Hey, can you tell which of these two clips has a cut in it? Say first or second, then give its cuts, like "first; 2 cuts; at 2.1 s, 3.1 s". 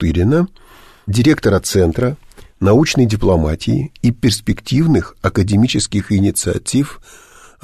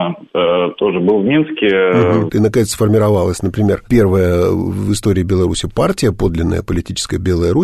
second; 1 cut; at 2.3 s